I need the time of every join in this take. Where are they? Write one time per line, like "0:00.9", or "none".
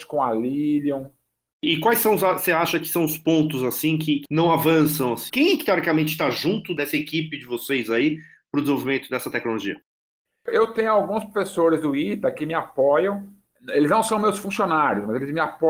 0:05.3